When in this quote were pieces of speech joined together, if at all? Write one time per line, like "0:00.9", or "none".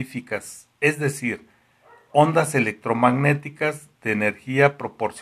none